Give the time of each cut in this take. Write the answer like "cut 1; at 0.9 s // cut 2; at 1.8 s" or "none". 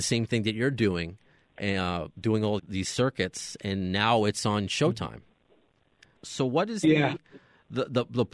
cut 1; at 2.6 s // cut 2; at 6.2 s